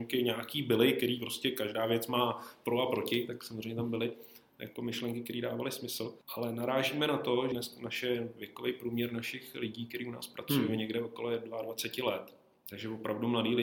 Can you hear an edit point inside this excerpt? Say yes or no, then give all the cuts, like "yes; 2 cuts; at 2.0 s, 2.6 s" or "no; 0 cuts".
yes; 2 cuts; at 6.2 s, 7.5 s